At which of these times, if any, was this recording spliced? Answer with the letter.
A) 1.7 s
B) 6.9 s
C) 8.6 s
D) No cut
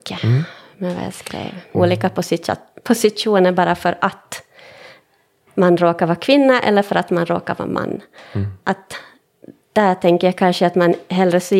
A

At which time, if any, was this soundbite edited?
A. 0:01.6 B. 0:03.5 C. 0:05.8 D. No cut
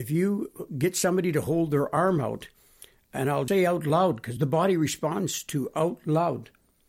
B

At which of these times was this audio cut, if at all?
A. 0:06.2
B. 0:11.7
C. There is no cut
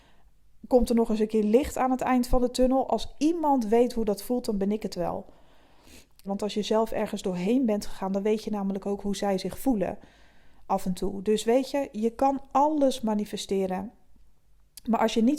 A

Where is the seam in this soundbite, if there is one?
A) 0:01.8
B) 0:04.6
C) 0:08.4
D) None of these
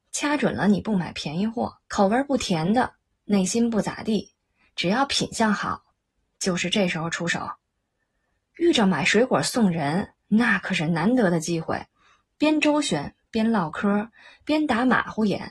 A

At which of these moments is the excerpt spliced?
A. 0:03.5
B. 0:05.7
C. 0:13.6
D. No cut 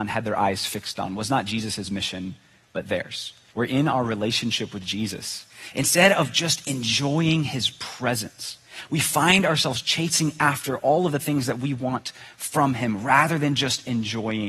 A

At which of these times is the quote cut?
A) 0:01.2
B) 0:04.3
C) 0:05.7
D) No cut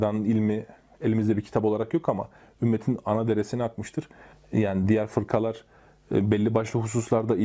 B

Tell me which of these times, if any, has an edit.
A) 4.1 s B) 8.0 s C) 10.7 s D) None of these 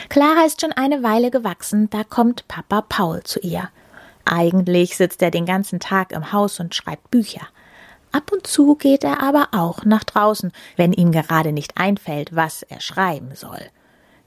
D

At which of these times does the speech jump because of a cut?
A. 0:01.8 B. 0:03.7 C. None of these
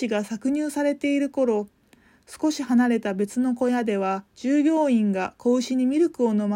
C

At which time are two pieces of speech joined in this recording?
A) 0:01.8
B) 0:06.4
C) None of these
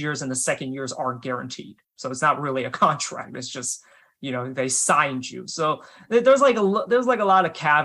A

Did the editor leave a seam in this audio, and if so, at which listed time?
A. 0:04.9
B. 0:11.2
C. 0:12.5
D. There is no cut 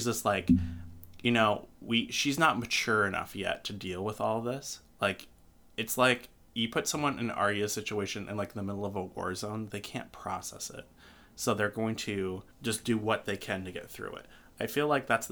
C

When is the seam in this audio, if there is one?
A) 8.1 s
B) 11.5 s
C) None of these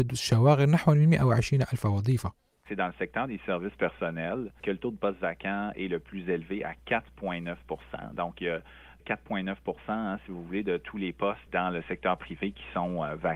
B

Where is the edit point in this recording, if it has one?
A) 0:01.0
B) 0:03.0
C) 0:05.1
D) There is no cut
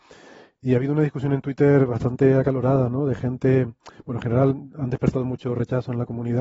D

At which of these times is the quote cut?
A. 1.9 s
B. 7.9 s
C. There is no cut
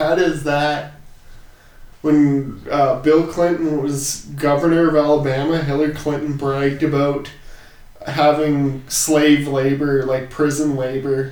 A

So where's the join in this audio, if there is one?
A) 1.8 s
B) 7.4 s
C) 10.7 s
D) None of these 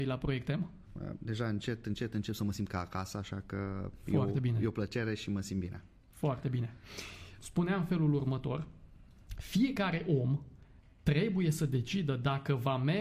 B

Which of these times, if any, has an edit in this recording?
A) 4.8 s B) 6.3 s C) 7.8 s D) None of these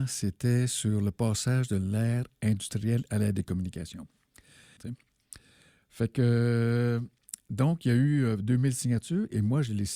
A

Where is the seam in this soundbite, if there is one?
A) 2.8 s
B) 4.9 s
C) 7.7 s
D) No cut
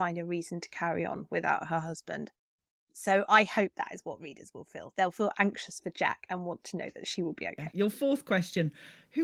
C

